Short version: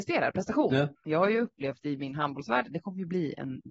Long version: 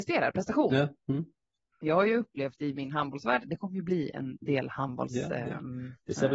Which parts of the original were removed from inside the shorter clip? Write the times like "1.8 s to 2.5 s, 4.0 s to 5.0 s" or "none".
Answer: 0.9 s to 1.7 s